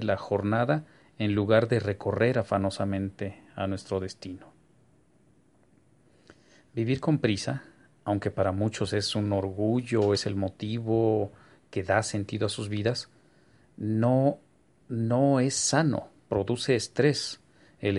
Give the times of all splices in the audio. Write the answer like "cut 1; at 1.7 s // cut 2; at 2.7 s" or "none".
none